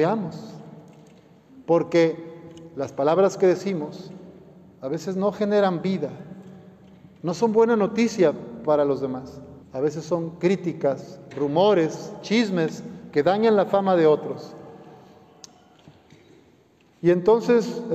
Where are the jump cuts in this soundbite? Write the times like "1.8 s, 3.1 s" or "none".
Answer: 9.6 s